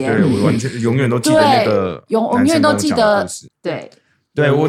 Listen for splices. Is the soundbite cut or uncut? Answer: cut